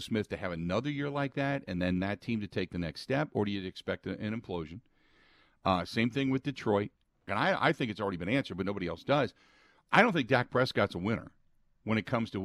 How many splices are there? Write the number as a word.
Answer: one